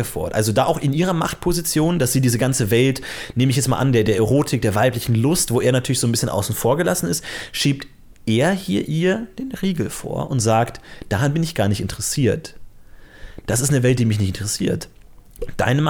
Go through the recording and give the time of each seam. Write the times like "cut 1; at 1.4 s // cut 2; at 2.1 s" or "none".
none